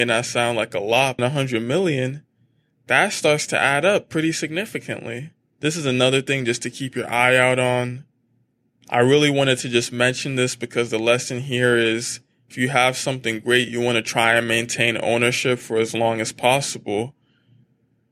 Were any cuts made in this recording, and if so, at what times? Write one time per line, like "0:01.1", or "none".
0:01.2